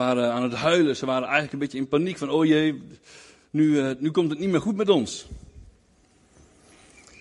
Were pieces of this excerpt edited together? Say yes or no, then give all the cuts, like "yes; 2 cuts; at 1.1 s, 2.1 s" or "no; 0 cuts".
no; 0 cuts